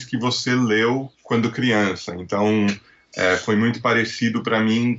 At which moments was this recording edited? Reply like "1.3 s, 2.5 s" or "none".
1.1 s